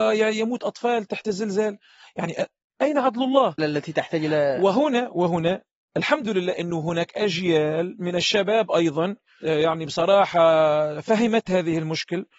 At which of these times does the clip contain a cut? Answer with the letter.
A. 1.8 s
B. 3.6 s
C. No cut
B